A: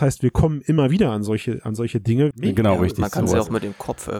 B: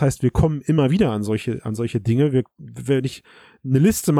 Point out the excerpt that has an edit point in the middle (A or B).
A